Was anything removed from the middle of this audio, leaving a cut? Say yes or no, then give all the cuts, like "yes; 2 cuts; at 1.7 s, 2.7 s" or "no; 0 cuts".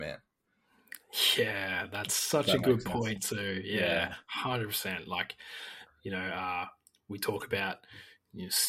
no; 0 cuts